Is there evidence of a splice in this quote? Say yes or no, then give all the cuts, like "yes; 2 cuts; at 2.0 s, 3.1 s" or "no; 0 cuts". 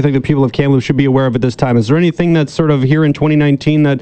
no; 0 cuts